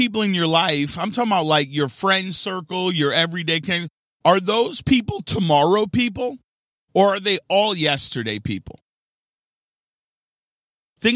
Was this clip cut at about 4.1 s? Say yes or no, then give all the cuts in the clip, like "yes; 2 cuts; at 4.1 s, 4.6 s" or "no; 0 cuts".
no; 0 cuts